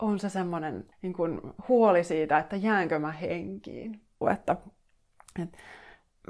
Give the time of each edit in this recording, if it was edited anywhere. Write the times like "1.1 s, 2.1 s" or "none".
0.9 s, 4.2 s